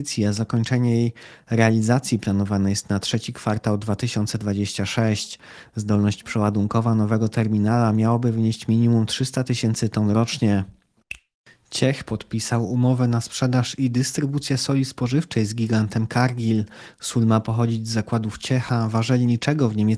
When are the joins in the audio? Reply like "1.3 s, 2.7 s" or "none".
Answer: none